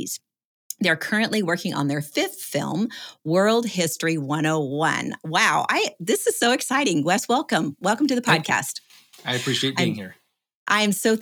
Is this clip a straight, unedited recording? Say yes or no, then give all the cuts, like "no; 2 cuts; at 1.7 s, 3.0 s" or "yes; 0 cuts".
yes; 0 cuts